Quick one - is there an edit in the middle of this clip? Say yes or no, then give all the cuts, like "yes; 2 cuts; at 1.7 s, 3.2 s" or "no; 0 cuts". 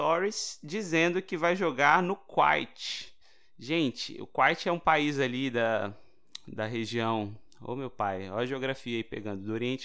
no; 0 cuts